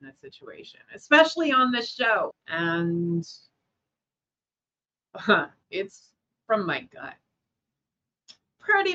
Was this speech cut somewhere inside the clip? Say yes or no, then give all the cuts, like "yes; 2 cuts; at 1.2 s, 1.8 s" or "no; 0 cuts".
yes; 2 cuts; at 2.3 s, 5.6 s